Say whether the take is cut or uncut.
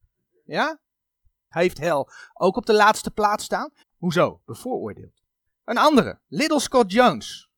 cut